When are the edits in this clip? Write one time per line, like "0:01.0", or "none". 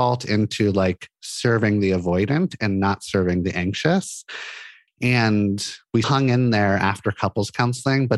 0:04.9
0:06.0